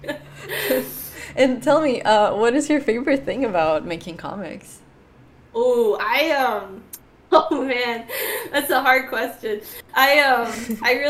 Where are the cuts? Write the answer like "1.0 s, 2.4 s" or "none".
7.2 s